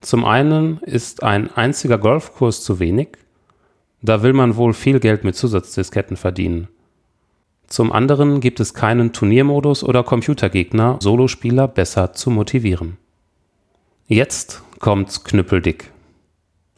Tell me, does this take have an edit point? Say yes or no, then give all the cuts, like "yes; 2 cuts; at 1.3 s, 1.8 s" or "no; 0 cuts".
yes; 2 cuts; at 11.0 s, 14.0 s